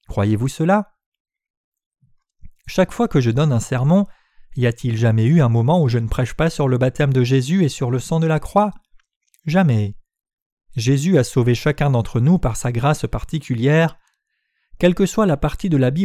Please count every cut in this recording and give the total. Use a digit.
0